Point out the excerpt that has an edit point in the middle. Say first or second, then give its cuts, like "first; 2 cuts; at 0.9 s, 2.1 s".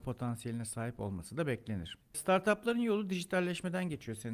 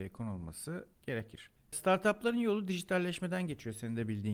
first; 1 cut; at 2.0 s